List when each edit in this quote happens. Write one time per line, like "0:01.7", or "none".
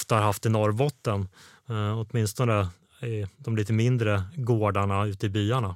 none